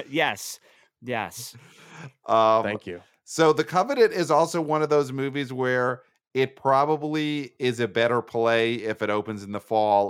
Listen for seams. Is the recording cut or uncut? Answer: uncut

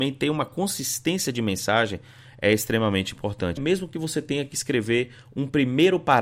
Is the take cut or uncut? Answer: cut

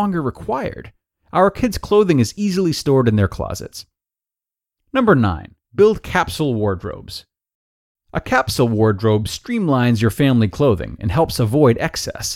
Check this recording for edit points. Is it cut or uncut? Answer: cut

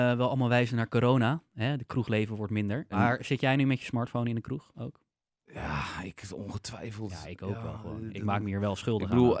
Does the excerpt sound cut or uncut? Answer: cut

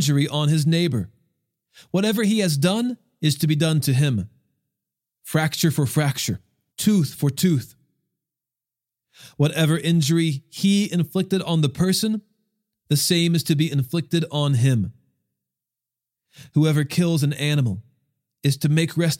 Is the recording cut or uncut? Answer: cut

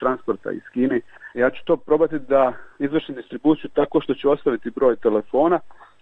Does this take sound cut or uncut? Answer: cut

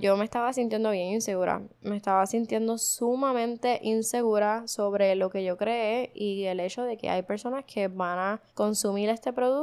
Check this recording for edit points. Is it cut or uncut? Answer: cut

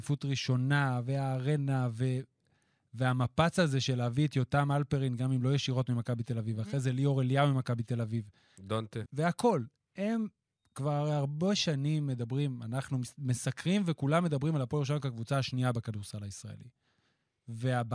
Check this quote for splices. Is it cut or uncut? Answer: cut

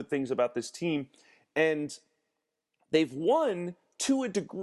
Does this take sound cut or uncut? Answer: uncut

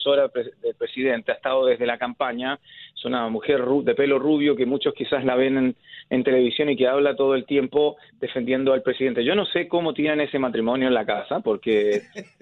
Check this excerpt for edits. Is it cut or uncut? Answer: uncut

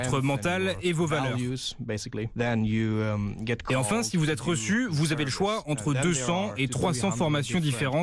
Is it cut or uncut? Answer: uncut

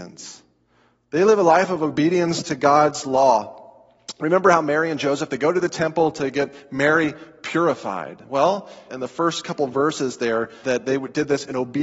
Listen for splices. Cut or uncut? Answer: cut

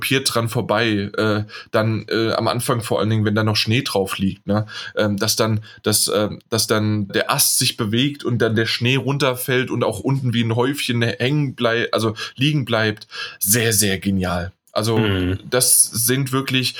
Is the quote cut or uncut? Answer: cut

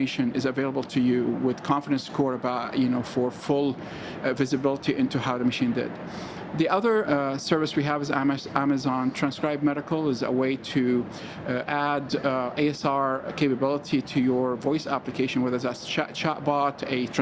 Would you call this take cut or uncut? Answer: cut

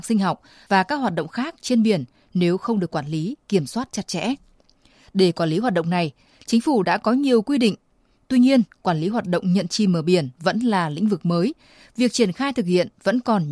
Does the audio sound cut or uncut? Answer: uncut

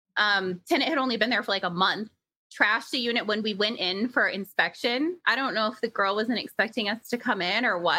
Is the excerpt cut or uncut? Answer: uncut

